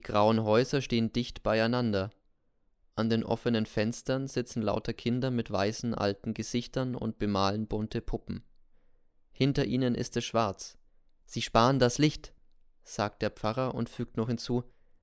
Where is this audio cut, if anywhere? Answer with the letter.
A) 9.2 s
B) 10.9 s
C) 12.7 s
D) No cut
D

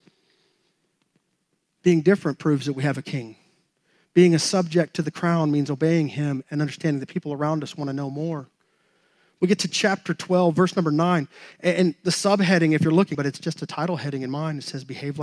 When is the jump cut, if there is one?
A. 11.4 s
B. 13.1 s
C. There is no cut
B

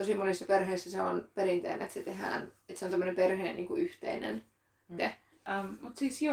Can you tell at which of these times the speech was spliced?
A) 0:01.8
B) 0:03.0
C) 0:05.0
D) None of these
C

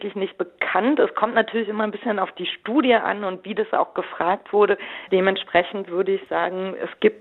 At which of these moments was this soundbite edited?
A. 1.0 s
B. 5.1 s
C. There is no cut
B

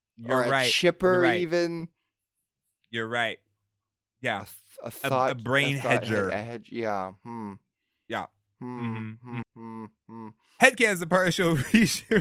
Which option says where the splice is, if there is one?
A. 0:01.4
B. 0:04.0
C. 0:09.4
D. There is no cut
C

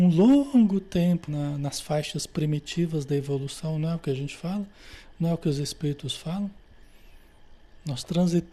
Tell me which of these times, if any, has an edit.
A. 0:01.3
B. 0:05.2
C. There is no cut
A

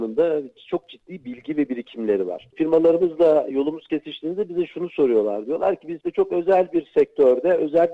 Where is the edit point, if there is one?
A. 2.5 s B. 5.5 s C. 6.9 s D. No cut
A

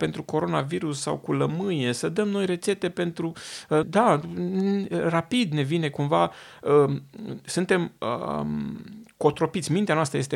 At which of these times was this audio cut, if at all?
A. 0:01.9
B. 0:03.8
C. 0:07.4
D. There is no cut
B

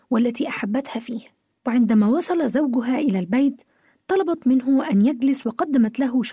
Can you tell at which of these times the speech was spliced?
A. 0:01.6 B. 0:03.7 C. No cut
A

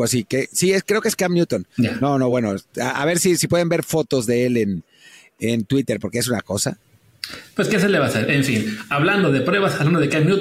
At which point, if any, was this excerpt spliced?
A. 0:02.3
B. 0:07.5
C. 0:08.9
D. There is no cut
D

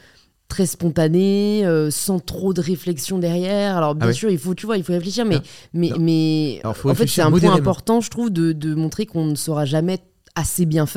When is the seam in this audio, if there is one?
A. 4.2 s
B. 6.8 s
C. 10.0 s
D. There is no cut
D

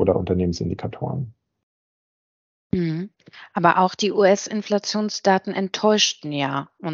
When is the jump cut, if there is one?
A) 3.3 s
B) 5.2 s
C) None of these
C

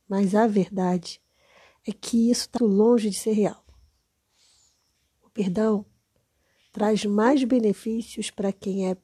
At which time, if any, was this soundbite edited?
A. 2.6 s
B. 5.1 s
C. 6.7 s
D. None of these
A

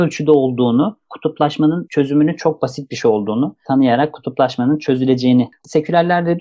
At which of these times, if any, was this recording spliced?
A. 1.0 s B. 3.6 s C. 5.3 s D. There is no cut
B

